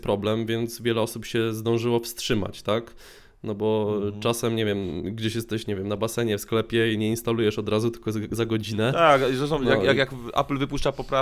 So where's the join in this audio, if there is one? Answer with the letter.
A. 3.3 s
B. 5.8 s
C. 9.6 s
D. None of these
D